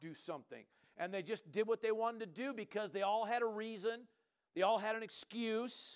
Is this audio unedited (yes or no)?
yes